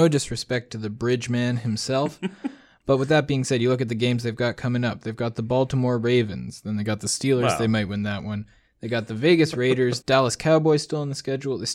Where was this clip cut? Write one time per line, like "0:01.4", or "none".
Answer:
0:10.0